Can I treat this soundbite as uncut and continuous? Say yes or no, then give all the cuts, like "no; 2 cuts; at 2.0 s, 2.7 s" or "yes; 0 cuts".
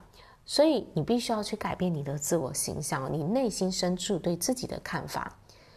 yes; 0 cuts